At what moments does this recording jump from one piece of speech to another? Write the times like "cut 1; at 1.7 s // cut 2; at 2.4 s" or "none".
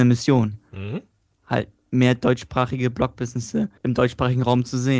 cut 1; at 3.8 s